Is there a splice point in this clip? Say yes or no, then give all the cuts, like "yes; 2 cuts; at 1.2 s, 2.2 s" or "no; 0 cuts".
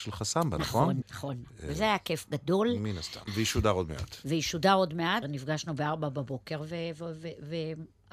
yes; 3 cuts; at 1.0 s, 3.3 s, 5.2 s